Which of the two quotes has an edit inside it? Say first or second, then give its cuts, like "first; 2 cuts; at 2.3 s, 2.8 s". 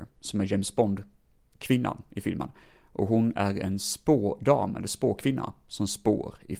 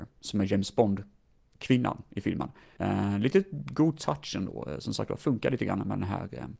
second; 1 cut; at 2.8 s